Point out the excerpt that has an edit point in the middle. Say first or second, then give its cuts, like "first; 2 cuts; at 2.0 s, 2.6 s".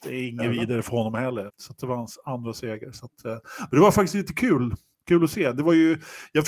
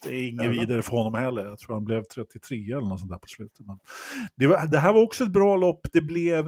first; 1 cut; at 1.5 s